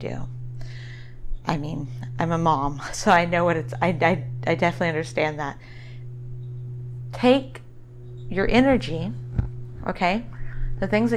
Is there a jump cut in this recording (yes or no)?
no